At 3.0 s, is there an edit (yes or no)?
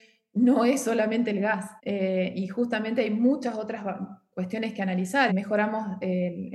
no